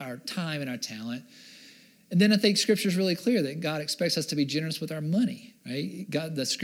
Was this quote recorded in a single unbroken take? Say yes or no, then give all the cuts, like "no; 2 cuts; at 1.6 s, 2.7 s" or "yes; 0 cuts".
no; 1 cut; at 5.6 s